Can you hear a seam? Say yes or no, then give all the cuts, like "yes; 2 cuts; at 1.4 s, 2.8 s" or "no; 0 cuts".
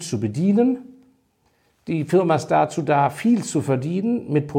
no; 0 cuts